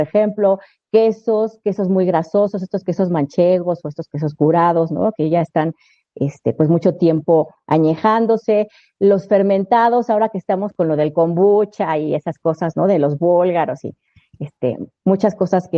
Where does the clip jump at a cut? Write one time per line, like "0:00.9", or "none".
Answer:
none